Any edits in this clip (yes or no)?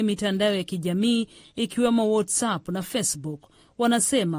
no